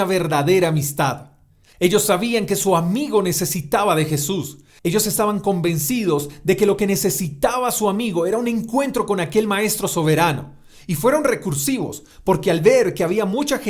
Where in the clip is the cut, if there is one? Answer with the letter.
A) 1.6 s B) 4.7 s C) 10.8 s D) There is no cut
A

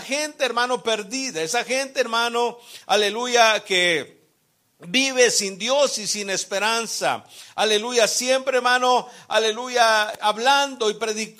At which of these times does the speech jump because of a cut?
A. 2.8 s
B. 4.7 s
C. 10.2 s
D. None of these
C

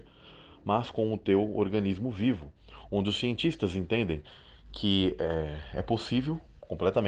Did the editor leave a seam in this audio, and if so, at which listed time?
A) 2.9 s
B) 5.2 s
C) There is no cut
C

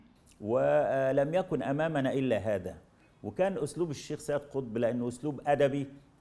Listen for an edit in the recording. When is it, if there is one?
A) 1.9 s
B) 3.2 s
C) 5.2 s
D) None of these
D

